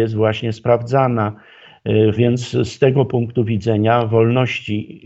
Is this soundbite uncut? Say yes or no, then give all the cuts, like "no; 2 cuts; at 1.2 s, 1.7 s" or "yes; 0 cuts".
no; 1 cut; at 2.2 s